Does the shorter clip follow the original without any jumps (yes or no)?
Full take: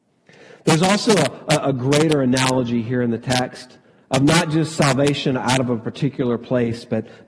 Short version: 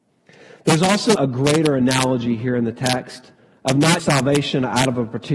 no